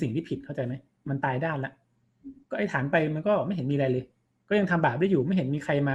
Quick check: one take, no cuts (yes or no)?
no